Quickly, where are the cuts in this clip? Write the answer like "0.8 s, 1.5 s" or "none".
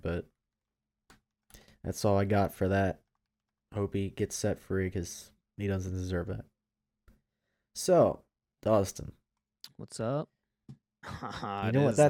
11.0 s